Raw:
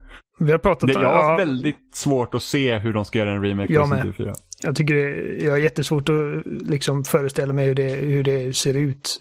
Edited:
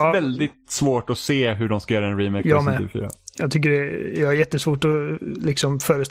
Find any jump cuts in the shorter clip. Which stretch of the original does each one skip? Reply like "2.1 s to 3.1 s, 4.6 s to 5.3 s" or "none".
none